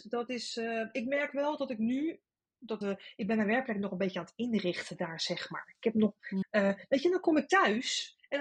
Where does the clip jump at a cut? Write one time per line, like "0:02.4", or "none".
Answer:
0:02.8
0:06.4